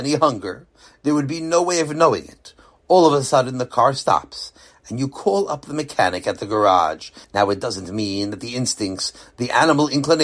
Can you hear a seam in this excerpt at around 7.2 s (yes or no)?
yes